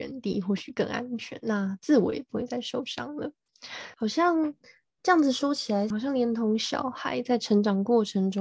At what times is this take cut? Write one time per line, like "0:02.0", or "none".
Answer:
0:03.9
0:05.9